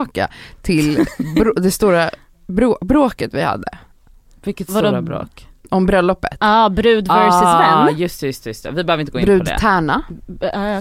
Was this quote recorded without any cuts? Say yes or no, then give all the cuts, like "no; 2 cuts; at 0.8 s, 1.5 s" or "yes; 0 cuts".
yes; 0 cuts